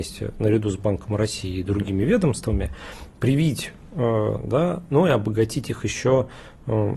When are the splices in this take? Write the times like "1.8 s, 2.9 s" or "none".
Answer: 3.1 s, 4.4 s